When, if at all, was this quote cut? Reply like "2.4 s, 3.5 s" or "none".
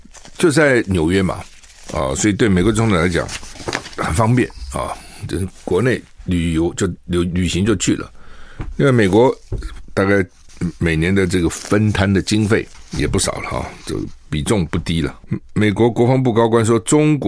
none